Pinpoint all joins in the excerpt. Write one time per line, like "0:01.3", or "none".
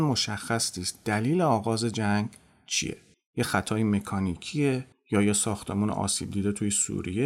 none

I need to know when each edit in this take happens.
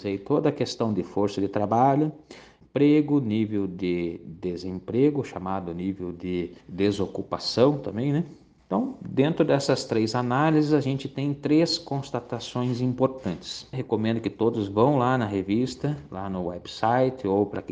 0:06.6
0:08.6
0:13.7

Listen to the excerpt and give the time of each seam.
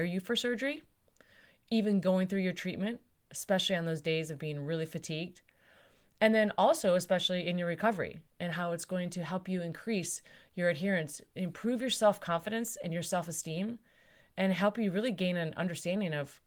none

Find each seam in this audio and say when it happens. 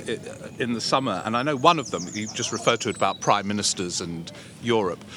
none

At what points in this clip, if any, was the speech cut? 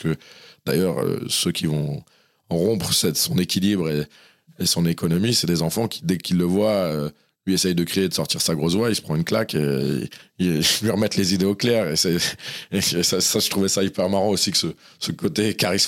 none

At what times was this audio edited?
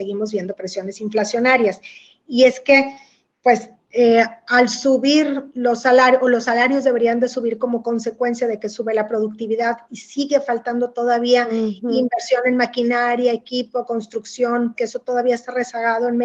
0:14.7

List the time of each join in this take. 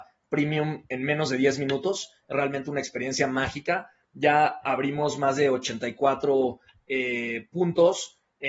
none

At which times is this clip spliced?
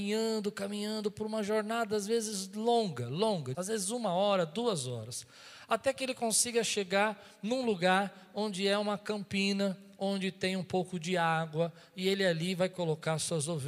0:03.5

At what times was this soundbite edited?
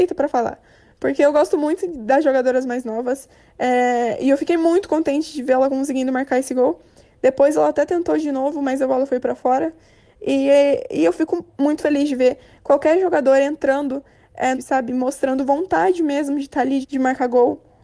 0:11.5
0:14.5
0:16.8

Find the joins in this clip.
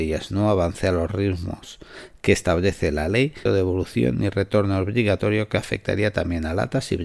0:03.5

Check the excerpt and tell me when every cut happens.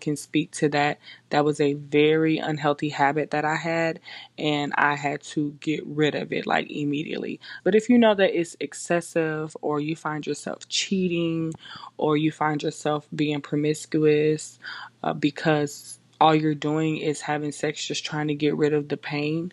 0:07.6

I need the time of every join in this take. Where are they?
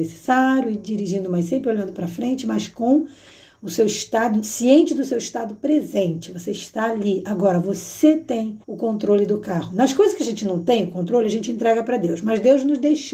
0:08.6

